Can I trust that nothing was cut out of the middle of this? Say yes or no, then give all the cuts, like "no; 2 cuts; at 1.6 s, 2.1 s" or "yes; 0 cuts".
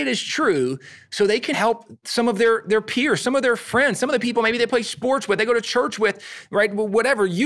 no; 1 cut; at 1.5 s